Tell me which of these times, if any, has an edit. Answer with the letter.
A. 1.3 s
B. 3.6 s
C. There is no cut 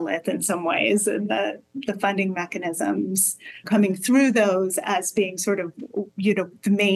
B